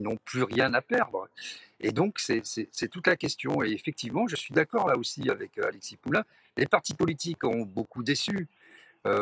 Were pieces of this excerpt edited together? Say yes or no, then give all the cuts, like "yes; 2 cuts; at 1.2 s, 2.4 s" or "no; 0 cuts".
no; 0 cuts